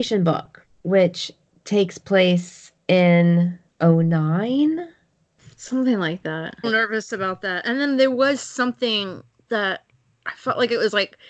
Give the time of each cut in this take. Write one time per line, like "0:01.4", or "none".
0:06.6